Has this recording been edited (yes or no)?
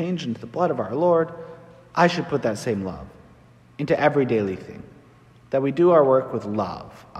no